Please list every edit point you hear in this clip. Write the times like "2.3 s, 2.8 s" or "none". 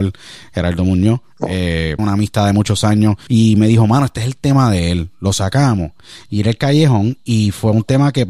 2.0 s, 3.3 s